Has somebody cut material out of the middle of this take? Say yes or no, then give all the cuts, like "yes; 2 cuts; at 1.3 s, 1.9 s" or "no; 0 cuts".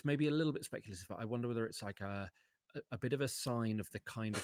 no; 0 cuts